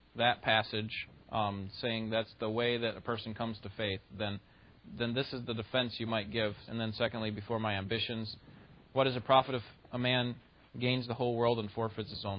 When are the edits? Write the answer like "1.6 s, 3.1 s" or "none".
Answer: 1.2 s, 6.7 s